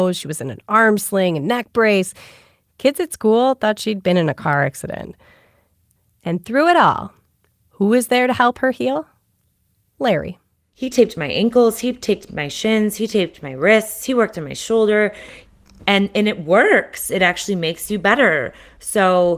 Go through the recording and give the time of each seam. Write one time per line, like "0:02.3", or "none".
none